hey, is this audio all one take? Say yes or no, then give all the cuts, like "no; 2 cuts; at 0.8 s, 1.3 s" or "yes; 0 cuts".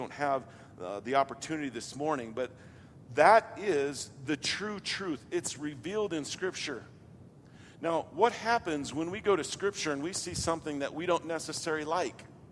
yes; 0 cuts